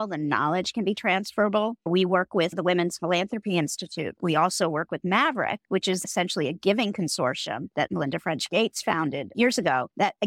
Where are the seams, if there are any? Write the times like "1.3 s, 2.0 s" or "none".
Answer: none